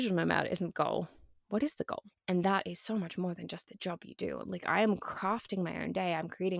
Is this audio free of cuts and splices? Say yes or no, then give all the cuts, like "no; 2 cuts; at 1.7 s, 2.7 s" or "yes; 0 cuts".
no; 2 cuts; at 2.1 s, 4.4 s